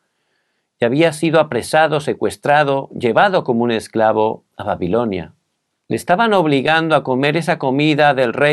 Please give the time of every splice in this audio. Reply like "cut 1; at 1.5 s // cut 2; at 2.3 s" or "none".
cut 1; at 5.8 s